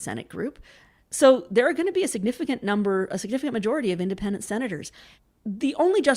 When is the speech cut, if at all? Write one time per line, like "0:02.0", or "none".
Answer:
none